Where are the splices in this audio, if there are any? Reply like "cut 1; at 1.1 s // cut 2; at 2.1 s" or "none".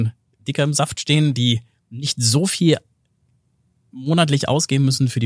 none

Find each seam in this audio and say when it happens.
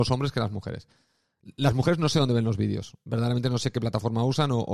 none

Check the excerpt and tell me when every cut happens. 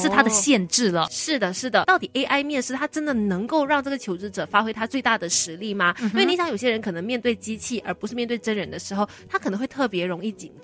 cut 1; at 1.8 s

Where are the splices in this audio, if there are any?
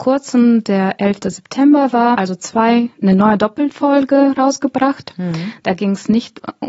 cut 1; at 2.1 s

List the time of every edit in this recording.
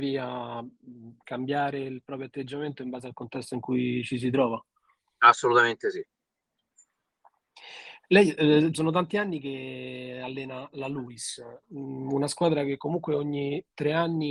cut 1; at 8.7 s // cut 2; at 11.6 s

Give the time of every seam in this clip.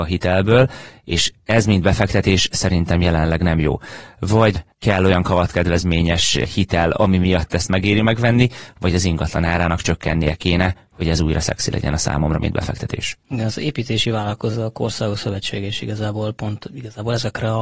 none

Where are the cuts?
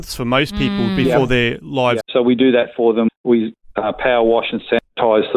cut 1; at 2.0 s // cut 2; at 3.1 s

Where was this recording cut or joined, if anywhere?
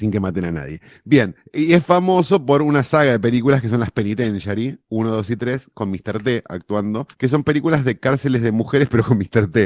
cut 1; at 7.1 s

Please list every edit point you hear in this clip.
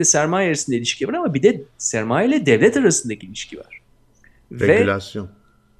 none

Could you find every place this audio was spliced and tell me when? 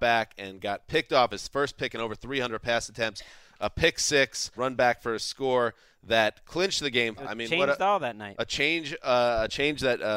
cut 1; at 4.6 s // cut 2; at 7.2 s

